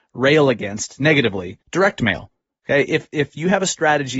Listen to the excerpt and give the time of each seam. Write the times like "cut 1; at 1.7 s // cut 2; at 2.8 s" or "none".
cut 1; at 1.6 s